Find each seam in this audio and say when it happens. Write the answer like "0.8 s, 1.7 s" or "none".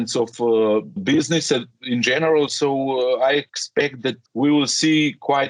1.0 s, 4.3 s